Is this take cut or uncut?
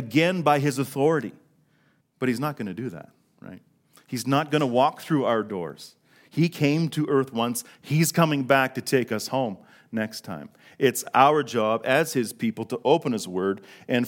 cut